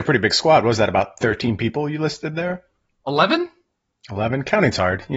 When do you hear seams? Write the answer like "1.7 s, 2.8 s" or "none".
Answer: none

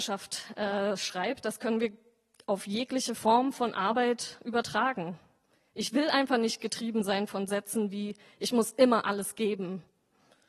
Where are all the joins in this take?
none

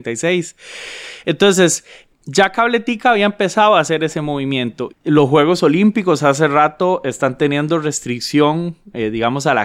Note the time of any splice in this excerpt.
4.9 s

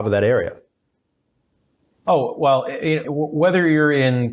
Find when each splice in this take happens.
3.0 s

